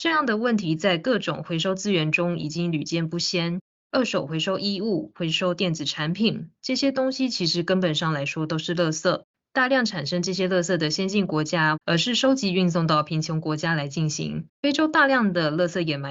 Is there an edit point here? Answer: yes; 1 cut; at 11.7 s

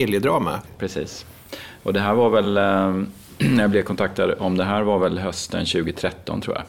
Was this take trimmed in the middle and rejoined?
no; 0 cuts

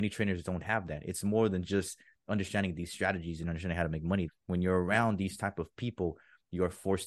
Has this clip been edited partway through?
yes; 1 cut; at 4.3 s

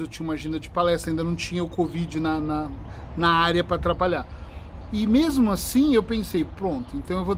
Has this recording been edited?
no; 0 cuts

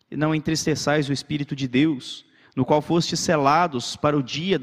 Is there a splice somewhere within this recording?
no; 0 cuts

